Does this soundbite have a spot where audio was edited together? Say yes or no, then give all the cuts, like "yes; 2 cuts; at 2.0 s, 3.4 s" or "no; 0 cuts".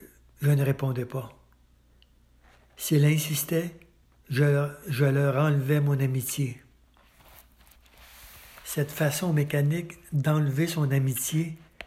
no; 0 cuts